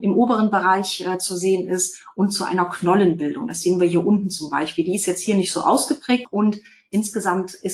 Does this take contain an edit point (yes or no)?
yes